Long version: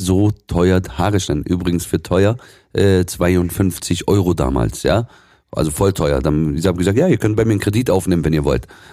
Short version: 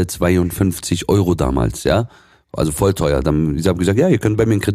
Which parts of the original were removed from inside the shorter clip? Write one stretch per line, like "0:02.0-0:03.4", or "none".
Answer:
none